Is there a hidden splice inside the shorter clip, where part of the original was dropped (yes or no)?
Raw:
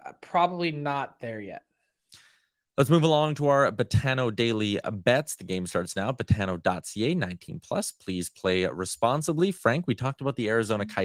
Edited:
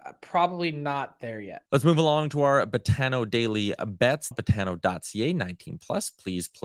yes